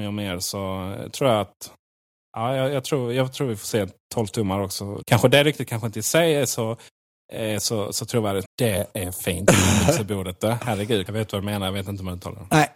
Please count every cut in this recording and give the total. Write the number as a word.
three